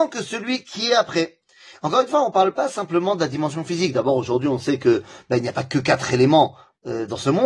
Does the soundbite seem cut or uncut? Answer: uncut